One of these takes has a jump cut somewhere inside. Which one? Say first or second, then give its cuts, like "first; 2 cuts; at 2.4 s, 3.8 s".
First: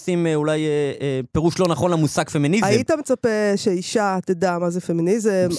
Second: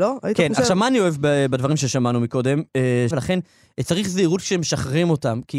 second; 1 cut; at 3.1 s